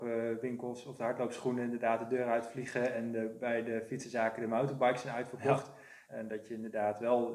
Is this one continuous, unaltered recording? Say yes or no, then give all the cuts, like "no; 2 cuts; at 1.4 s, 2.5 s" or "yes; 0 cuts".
no; 1 cut; at 6.1 s